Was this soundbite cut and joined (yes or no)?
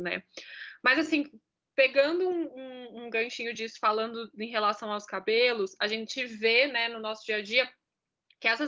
no